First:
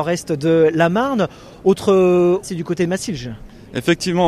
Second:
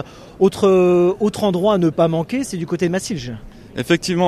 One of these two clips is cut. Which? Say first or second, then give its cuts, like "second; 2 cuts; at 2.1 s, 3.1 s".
first; 1 cut; at 2.4 s